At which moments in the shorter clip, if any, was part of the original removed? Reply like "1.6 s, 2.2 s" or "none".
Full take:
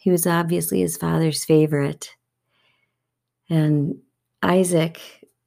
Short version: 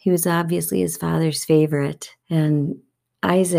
2.2 s